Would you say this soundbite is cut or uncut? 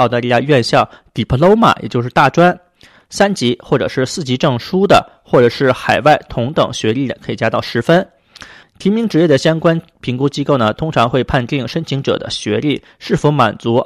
cut